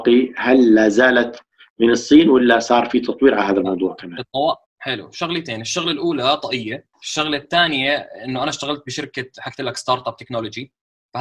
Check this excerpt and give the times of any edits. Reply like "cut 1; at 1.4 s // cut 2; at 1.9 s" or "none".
cut 1; at 4.7 s // cut 2; at 6.9 s